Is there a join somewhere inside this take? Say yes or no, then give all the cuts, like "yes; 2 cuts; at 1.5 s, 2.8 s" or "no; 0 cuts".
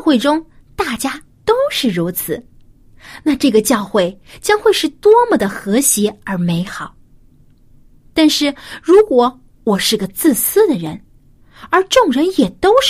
no; 0 cuts